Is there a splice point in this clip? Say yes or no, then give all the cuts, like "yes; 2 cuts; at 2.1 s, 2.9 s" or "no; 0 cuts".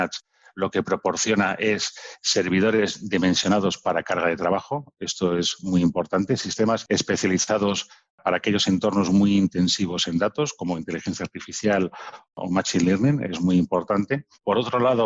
no; 0 cuts